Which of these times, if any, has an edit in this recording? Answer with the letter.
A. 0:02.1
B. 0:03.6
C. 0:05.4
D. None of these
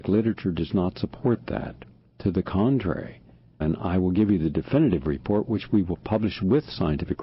B